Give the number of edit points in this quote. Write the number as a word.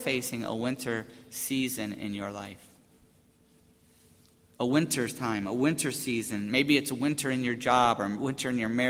zero